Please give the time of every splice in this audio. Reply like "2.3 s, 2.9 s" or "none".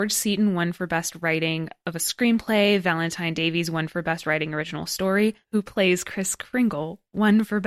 5.4 s